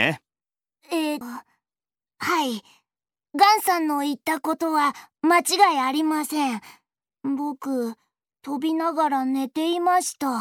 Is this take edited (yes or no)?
yes